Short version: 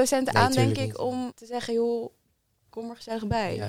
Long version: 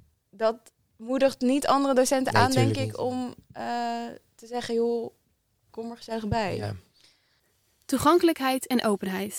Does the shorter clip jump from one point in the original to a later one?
yes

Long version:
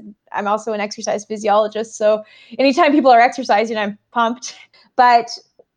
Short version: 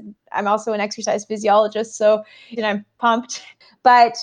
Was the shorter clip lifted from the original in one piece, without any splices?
no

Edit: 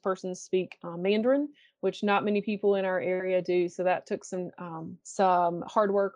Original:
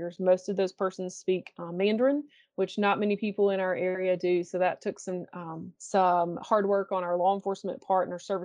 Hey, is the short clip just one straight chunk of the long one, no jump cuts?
yes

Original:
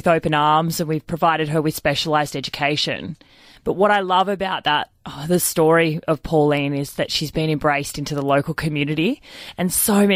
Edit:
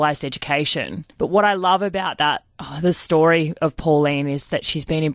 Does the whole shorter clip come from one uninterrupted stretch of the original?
no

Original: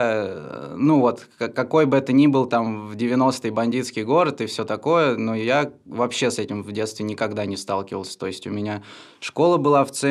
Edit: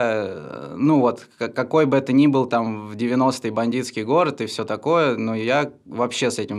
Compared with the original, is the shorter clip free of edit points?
yes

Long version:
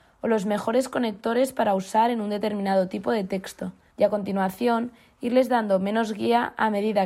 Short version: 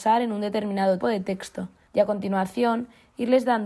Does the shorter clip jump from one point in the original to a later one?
yes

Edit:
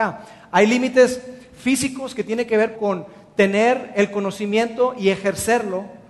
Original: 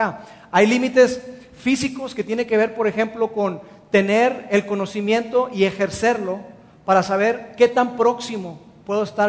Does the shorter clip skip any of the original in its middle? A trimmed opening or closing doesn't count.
yes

